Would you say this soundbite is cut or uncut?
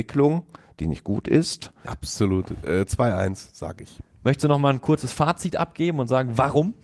cut